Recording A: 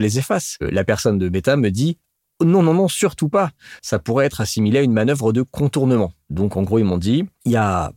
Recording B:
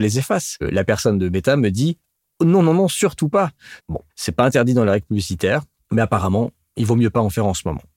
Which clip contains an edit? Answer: B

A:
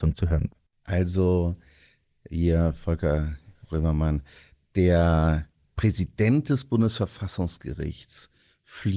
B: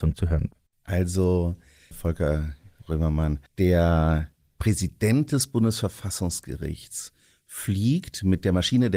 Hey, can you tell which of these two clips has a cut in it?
B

